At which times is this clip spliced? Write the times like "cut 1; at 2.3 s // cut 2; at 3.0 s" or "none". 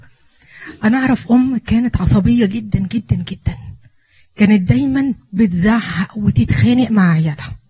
none

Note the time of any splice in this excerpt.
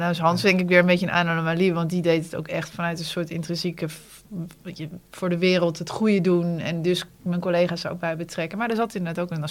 none

